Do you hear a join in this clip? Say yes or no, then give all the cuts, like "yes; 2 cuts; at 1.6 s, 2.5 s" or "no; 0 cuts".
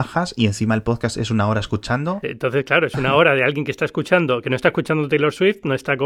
yes; 1 cut; at 2.2 s